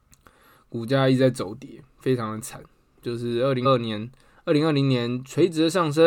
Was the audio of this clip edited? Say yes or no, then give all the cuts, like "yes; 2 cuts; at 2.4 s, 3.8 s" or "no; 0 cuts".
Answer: yes; 1 cut; at 3.6 s